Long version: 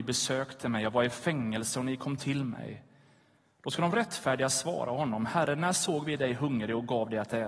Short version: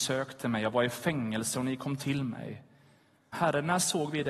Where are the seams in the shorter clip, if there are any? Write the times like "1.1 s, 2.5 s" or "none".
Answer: 3.3 s